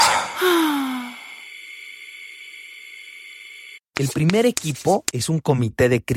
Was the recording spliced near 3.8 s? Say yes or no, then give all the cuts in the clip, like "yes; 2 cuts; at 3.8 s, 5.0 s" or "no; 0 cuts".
yes; 1 cut; at 3.8 s